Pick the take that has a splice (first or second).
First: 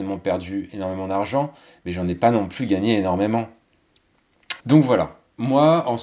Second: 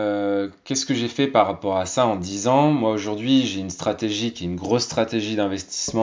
first